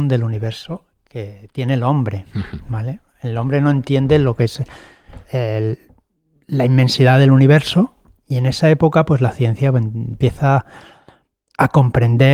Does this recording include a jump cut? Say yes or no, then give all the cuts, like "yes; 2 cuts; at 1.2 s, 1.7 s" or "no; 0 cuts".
no; 0 cuts